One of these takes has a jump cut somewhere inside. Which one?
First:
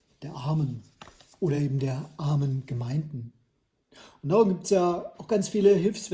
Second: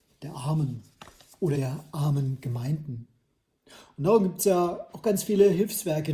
second; 1 cut; at 1.5 s

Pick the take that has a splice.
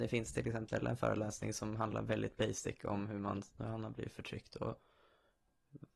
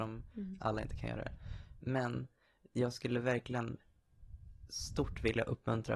first; 1 cut; at 3.6 s

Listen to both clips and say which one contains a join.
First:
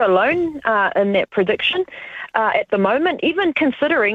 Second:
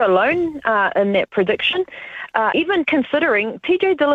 second; 1 cut; at 2.5 s

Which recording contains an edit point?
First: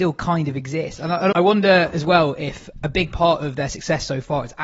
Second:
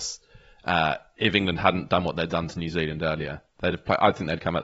first; 1 cut; at 1.3 s

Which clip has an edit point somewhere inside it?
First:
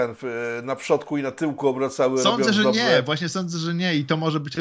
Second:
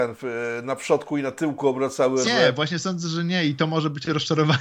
second; 1 cut; at 2.2 s

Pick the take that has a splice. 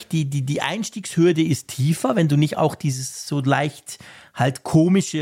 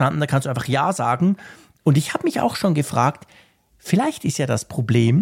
second; 1 cut; at 1.8 s

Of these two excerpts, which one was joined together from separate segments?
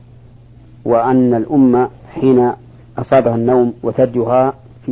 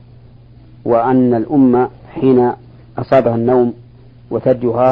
first; 1 cut; at 3.8 s

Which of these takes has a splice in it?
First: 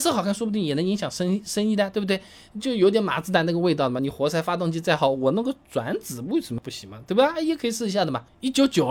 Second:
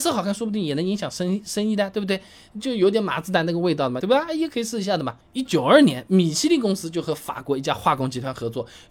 second; 2 cuts; at 4.0 s, 5.5 s

